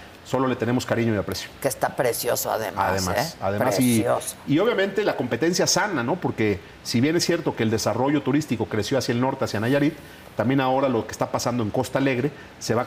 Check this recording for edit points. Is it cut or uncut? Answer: uncut